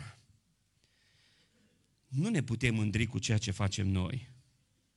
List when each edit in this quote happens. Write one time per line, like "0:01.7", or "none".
none